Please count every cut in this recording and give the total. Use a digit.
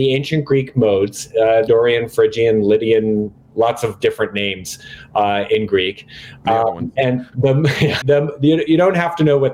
2